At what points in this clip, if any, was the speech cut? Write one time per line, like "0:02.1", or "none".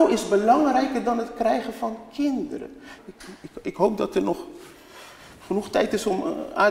0:03.0

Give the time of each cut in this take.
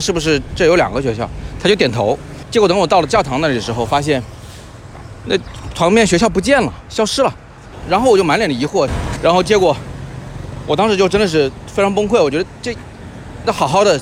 0:09.2

